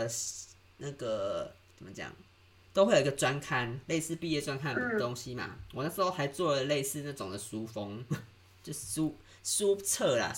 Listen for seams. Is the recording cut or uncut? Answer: uncut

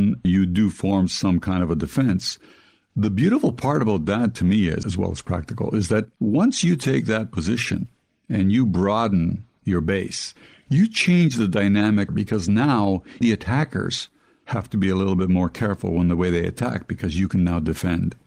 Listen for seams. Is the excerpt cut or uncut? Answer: cut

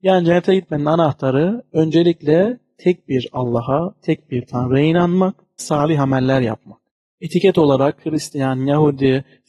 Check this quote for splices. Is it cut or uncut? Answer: cut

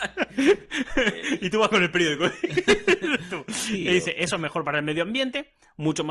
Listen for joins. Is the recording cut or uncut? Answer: uncut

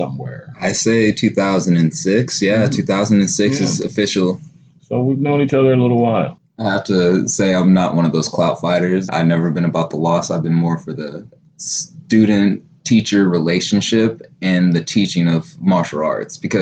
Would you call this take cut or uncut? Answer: cut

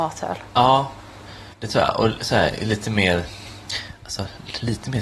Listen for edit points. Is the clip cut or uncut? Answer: cut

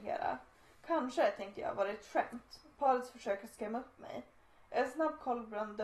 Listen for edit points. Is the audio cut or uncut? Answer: uncut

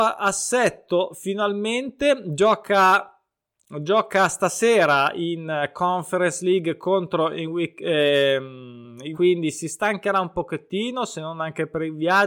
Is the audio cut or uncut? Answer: cut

